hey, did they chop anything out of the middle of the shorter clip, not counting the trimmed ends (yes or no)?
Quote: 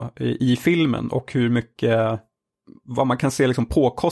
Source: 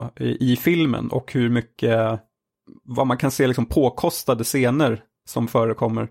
no